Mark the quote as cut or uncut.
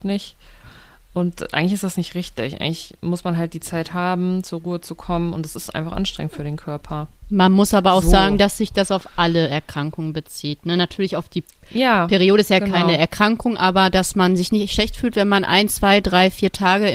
uncut